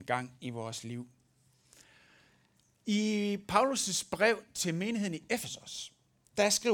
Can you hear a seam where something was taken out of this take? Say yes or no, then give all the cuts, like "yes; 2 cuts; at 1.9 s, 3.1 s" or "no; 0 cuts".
no; 0 cuts